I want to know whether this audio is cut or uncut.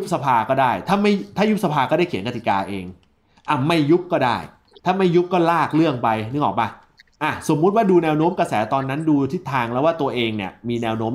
uncut